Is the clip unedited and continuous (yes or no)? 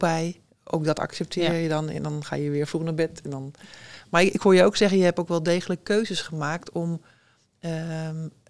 yes